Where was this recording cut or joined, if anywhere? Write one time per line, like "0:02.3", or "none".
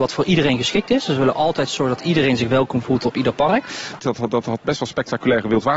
0:04.0

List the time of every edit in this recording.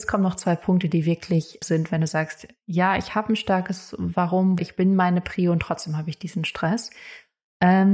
0:01.6
0:04.6

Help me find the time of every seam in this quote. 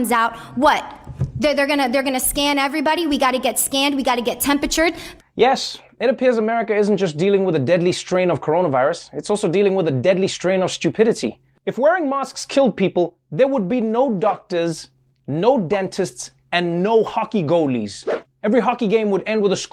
none

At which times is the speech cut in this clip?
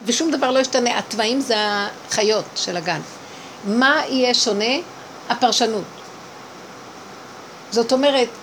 none

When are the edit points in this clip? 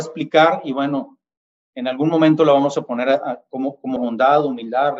0:04.0

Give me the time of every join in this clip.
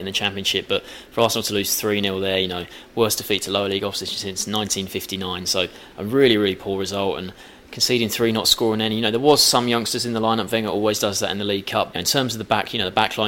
0:11.9

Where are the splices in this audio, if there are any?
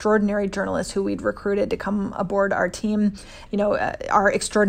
0:03.5

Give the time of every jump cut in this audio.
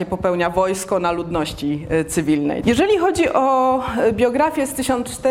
0:02.6

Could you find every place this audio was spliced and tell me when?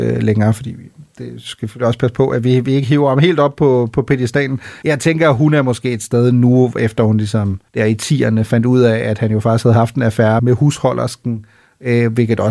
0:04.8
0:07.7
0:10.4

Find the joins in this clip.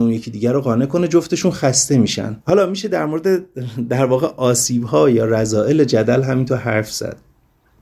0:02.4

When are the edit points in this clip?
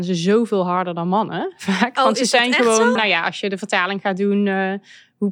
0:03.0

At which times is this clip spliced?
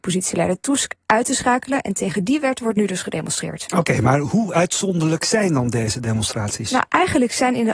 none

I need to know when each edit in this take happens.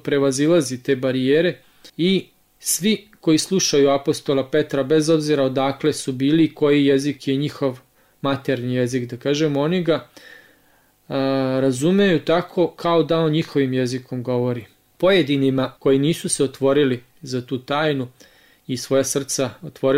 0:01.9

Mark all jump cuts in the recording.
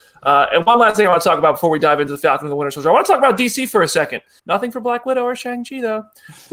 0:04.4

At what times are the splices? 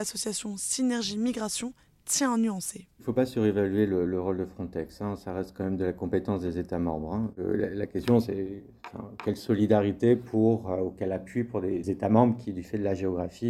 0:11.8

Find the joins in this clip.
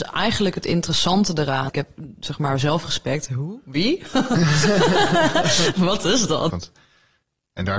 0:01.7
0:06.5

